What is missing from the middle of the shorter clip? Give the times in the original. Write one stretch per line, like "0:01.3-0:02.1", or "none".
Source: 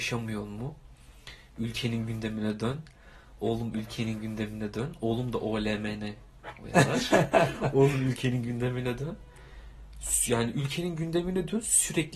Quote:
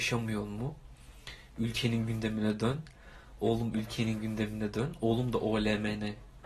none